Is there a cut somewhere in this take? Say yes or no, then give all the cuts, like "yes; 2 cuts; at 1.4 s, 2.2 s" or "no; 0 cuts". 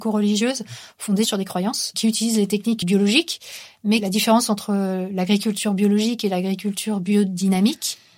yes; 1 cut; at 2.8 s